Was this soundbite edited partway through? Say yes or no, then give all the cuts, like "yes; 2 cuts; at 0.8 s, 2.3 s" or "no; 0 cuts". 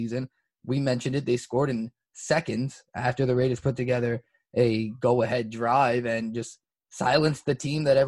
no; 0 cuts